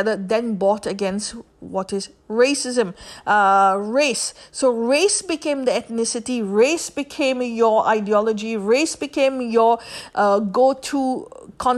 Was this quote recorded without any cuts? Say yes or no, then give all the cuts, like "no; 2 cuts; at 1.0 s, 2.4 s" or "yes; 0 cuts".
yes; 0 cuts